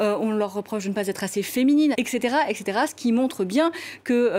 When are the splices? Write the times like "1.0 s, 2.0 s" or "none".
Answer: 1.9 s